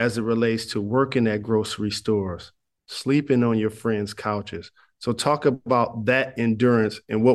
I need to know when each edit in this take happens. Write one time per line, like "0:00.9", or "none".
none